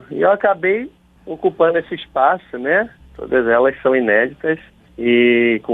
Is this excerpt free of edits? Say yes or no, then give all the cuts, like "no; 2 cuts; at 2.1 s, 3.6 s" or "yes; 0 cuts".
no; 1 cut; at 3.0 s